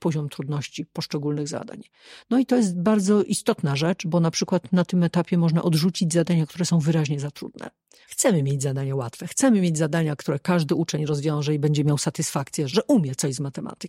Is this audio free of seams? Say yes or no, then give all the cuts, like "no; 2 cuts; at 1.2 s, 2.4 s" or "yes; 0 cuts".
no; 2 cuts; at 8.1 s, 12.7 s